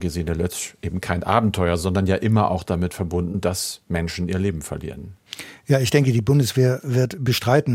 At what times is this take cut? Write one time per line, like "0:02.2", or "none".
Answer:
none